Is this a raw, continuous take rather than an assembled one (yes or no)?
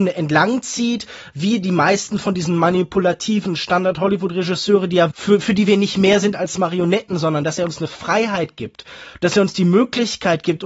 no